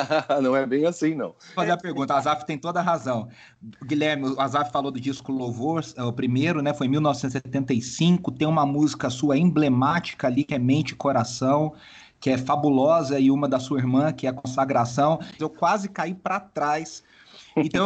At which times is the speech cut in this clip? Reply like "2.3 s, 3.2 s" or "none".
1.6 s, 15.4 s